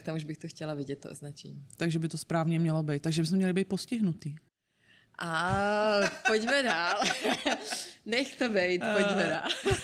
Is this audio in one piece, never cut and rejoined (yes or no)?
yes